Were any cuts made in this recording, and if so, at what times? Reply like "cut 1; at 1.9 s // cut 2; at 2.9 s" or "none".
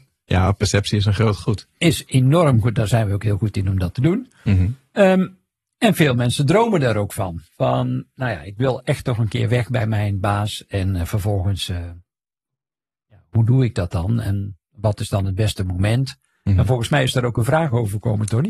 none